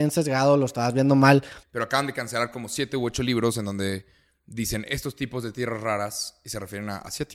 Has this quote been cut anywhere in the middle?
yes; 1 cut; at 1.6 s

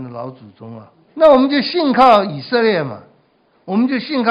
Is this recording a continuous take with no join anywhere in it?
no; 1 cut; at 1.1 s

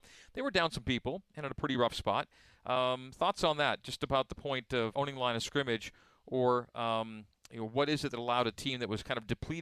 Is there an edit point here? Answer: yes; 1 cut; at 4.9 s

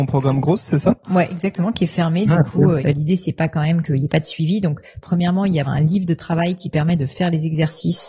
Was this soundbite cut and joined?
yes; 2 cuts; at 2.8 s, 5.7 s

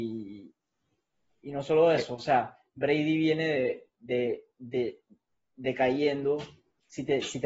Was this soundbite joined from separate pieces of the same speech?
no; 0 cuts

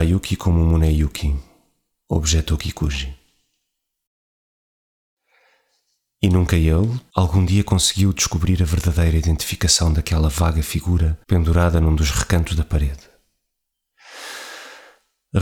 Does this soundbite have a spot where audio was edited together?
yes; 2 cuts; at 7.1 s, 11.2 s

